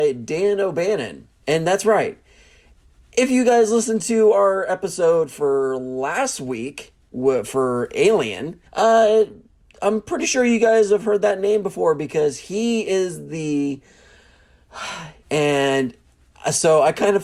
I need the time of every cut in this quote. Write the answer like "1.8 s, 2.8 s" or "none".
1.4 s, 8.7 s, 15.2 s